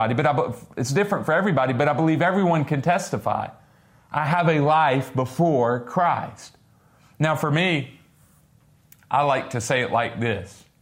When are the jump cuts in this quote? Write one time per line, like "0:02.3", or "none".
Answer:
none

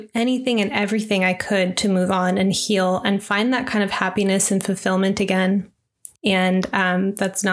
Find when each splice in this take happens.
0:06.1

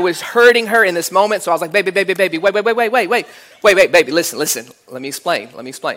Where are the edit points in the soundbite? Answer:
none

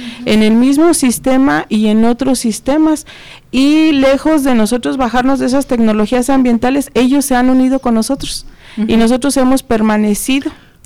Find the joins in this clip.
none

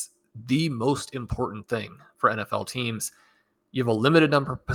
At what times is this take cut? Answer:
none

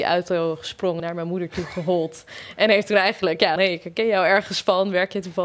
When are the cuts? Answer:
0:01.0
0:03.6

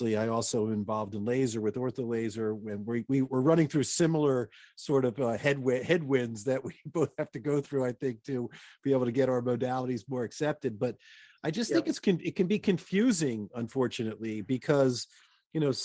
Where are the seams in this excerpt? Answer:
none

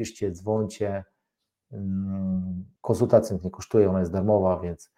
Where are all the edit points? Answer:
0:02.8

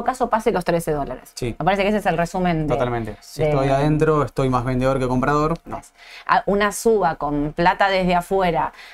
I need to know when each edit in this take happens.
0:05.6

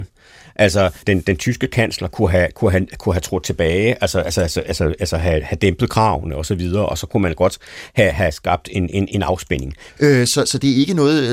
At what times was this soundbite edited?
0:01.0
0:09.9

